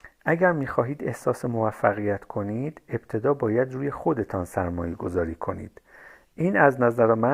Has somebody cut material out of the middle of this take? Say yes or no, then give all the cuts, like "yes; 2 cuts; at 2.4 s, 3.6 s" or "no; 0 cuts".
no; 0 cuts